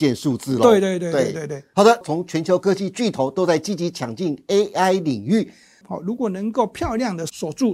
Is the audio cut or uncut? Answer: cut